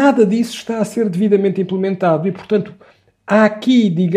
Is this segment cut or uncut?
uncut